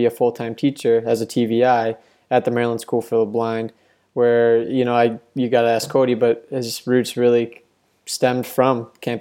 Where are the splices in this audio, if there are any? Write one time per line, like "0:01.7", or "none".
none